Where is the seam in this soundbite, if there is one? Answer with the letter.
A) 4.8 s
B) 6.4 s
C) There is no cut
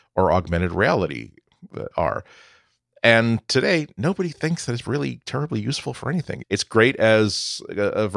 B